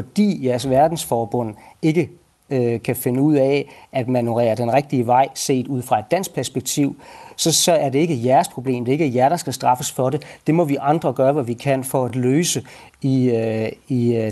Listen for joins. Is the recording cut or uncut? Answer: uncut